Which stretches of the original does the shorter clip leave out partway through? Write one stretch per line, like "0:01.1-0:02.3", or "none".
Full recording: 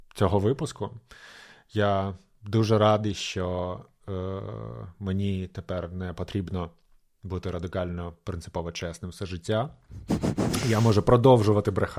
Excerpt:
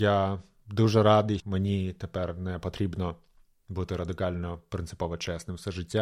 0:03.2-0:04.9